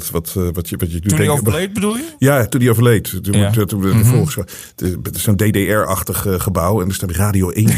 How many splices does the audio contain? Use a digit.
0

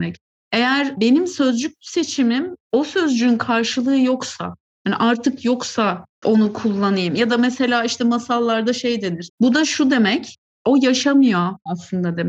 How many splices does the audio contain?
1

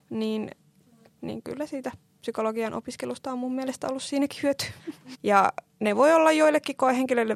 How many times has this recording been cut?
2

